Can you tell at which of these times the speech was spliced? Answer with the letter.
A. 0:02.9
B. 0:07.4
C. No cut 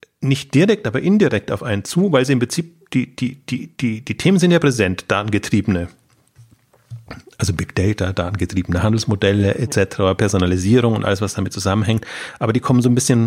C